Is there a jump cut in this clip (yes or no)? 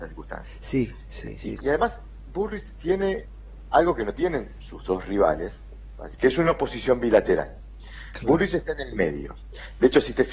yes